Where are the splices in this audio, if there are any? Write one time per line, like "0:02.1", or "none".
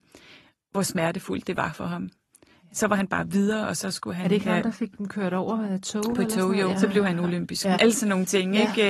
0:06.7
0:07.7